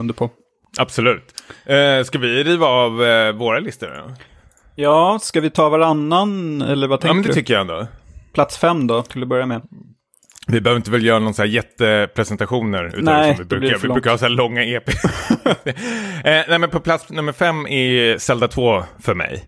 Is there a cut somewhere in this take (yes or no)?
no